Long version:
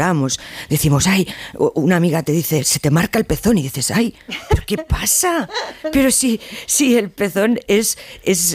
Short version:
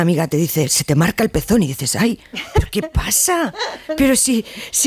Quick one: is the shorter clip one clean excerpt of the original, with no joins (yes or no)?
yes